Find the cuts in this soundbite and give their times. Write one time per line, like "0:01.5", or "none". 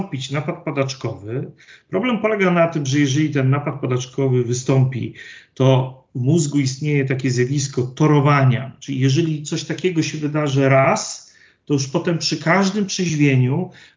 none